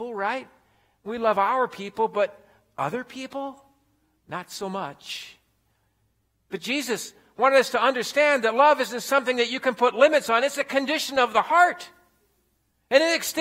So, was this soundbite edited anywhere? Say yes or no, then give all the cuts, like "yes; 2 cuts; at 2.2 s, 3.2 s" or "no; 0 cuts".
no; 0 cuts